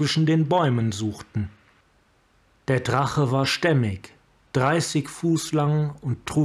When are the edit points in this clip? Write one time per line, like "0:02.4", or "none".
none